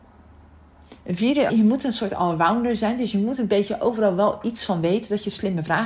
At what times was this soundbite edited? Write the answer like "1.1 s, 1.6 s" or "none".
1.5 s